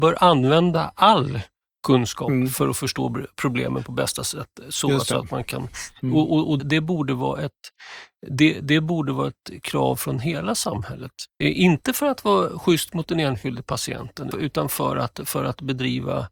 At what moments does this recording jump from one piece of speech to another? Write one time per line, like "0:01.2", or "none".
0:06.6
0:11.4
0:14.3